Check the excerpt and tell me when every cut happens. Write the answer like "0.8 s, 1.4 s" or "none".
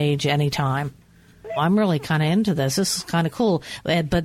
1.6 s